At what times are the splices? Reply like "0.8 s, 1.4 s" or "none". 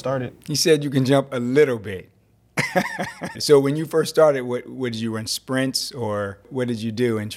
3.3 s